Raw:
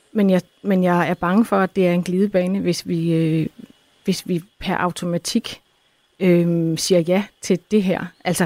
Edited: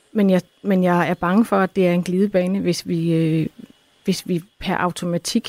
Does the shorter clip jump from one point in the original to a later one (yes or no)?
no